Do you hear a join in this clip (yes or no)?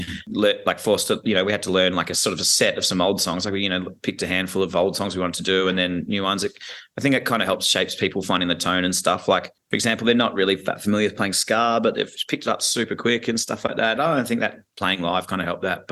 yes